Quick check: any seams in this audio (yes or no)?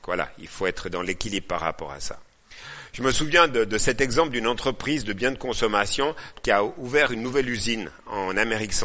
no